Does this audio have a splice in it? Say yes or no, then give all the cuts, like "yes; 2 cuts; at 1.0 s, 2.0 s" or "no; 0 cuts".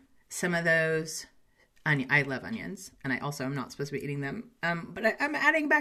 no; 0 cuts